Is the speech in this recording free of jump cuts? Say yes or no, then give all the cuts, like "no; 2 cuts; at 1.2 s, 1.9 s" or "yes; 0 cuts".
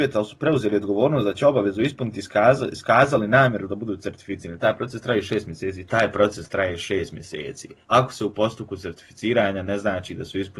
no; 2 cuts; at 5.9 s, 7.8 s